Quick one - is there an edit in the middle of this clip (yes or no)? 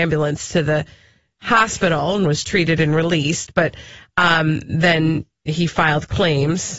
no